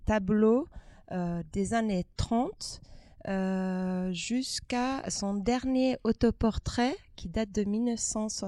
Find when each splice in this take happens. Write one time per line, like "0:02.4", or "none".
none